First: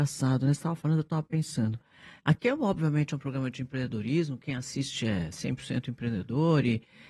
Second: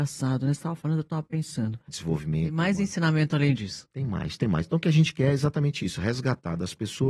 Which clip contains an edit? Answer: second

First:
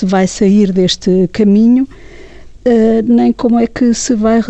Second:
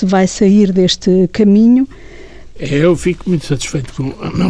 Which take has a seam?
second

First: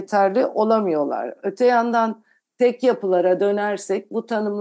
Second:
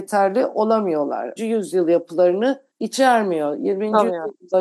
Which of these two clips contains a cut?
second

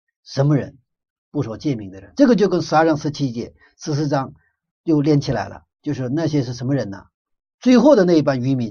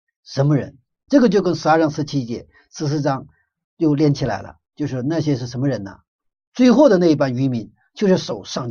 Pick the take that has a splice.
second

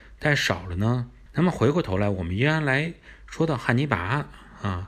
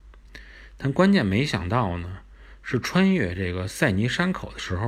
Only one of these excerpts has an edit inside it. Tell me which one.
first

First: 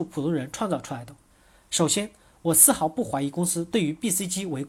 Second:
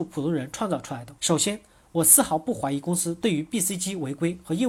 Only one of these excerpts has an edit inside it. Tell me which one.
second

